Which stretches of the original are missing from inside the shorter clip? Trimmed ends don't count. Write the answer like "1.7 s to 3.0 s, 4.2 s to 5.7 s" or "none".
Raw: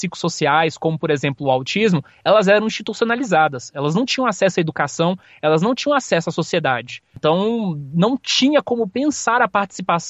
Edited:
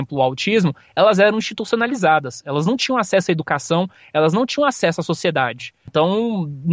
none